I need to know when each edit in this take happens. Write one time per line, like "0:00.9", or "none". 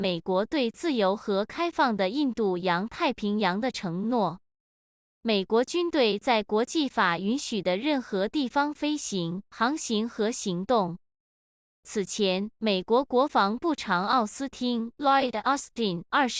none